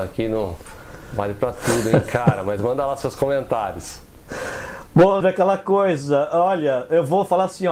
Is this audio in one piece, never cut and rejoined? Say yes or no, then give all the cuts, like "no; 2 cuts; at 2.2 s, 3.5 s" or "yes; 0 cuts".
no; 1 cut; at 5.2 s